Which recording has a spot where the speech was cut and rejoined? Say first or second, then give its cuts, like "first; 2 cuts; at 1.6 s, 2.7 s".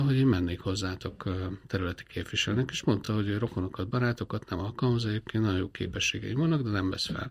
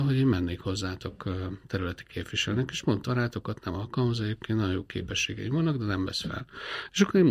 second; 1 cut; at 3.1 s